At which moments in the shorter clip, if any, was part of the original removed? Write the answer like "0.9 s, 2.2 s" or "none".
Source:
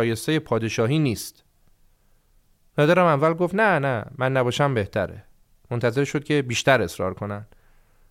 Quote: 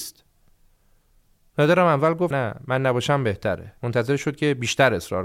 2.3 s, 3.8 s